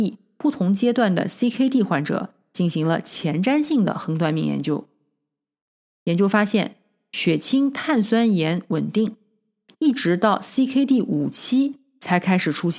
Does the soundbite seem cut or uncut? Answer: uncut